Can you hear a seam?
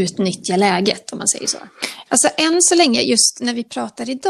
yes; 1 cut; at 2.1 s

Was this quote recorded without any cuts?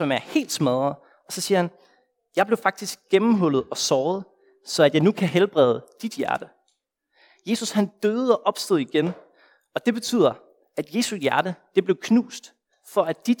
yes; 0 cuts

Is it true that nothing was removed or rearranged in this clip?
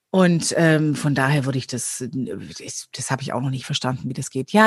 yes; 0 cuts

